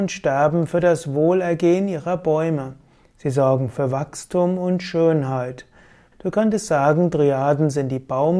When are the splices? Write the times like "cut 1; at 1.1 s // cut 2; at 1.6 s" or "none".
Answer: cut 1; at 6.1 s